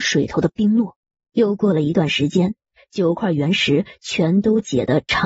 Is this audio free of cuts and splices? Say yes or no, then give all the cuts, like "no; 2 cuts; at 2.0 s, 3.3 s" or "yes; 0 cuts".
no; 1 cut; at 1.3 s